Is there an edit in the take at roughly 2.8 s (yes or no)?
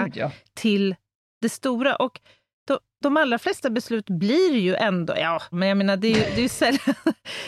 no